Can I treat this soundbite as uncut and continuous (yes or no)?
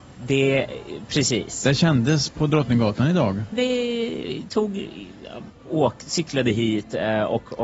no